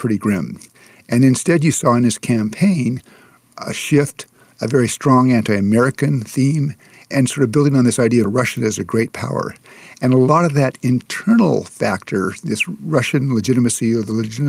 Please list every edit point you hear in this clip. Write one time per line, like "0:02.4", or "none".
none